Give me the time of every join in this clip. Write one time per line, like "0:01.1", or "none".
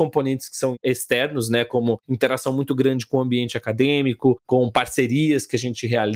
none

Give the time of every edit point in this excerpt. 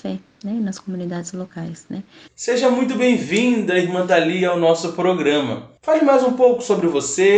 0:02.3
0:05.8

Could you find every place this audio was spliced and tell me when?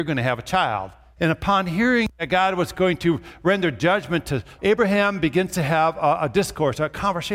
0:01.2
0:04.6

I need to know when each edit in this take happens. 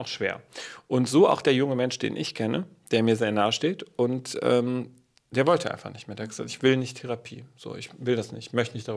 none

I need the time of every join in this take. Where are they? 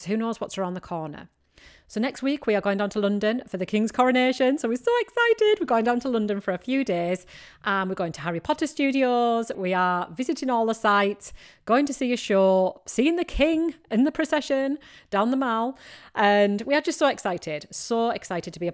0:09.5

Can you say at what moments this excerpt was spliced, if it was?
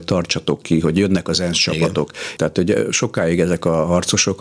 0:02.4

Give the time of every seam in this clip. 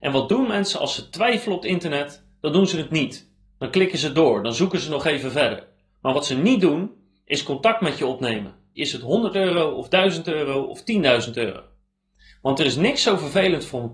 0:08.8

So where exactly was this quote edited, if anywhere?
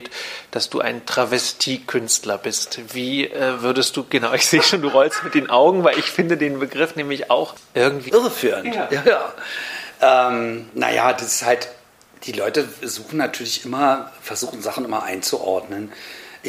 0:08.1

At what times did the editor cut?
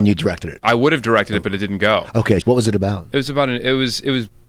0:02.4

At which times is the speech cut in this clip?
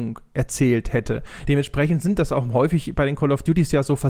none

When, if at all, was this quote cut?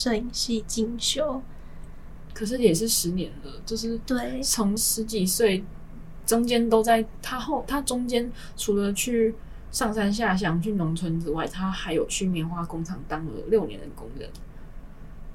0:04.8

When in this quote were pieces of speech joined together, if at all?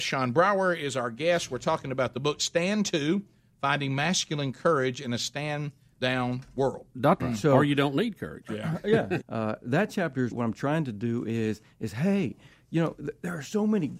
0:07.2
0:09.2
0:10.3

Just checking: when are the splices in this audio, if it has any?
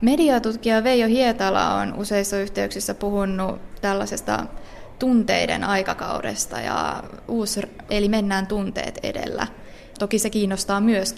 0:07.9
0:09.9

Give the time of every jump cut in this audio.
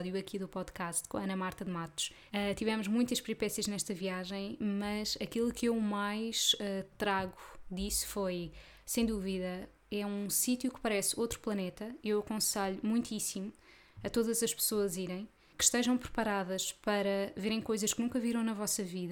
0:02.3

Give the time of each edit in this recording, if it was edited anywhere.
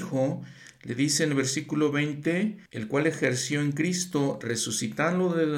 0:02.7

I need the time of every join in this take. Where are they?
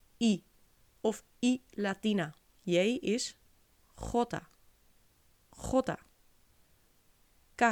0:02.5

